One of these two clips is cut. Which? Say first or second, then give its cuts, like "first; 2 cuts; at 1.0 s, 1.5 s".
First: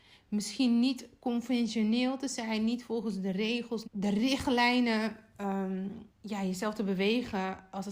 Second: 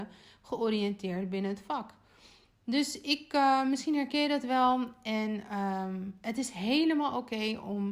first; 2 cuts; at 3.8 s, 6.1 s